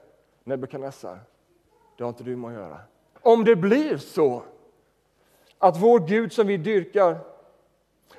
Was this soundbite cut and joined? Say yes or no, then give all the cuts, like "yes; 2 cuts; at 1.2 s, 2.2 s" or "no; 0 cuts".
yes; 1 cut; at 3.2 s